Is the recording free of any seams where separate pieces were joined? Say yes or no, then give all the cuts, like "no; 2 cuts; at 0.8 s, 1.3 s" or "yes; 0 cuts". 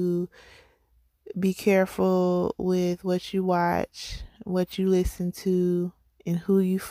yes; 0 cuts